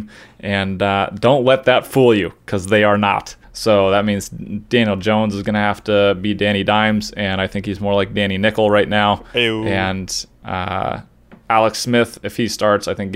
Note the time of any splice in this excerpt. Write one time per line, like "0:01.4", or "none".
0:03.4